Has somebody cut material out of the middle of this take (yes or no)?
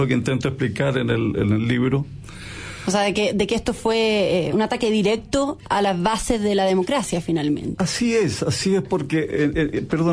yes